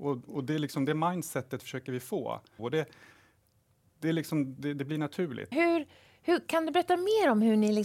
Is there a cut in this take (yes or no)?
yes